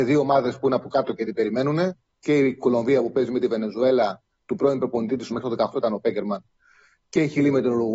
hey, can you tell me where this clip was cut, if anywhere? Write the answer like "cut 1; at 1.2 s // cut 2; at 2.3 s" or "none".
cut 1; at 5.3 s